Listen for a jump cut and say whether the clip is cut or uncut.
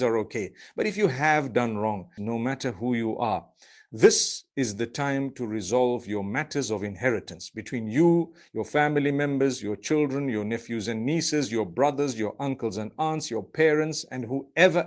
cut